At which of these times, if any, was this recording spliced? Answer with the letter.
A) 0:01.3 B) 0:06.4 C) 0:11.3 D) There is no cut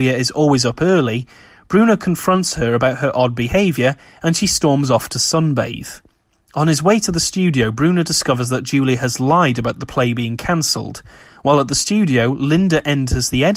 D